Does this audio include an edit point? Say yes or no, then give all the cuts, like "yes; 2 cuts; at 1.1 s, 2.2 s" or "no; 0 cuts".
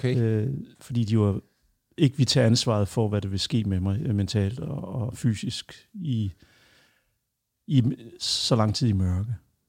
no; 0 cuts